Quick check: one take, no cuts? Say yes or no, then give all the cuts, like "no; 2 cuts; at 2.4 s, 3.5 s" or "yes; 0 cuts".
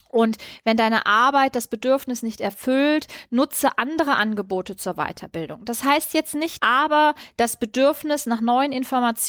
no; 1 cut; at 6.6 s